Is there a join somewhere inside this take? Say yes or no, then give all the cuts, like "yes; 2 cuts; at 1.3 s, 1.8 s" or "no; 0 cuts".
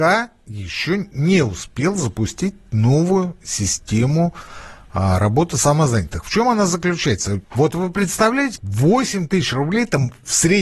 yes; 2 cuts; at 7.4 s, 8.6 s